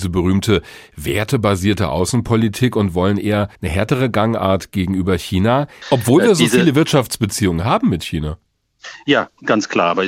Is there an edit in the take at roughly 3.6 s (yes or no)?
yes